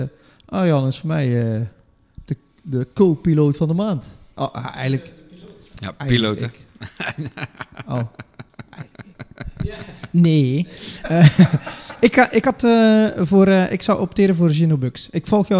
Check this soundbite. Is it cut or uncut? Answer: uncut